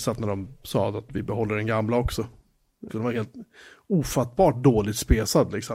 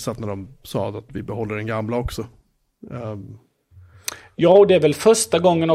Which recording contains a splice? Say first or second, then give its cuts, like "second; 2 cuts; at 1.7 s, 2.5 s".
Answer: first; 1 cut; at 2.9 s